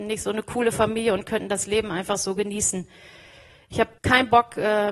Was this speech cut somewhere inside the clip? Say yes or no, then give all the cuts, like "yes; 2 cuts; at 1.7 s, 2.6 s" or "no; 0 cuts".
yes; 1 cut; at 4.0 s